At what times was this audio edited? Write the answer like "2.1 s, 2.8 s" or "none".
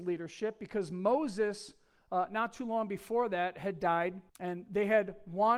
4.3 s